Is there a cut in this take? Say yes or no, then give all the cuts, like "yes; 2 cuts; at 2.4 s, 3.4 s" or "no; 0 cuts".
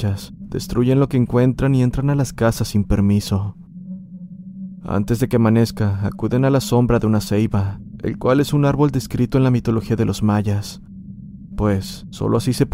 no; 0 cuts